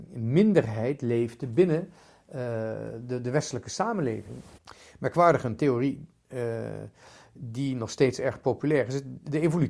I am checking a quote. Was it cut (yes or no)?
yes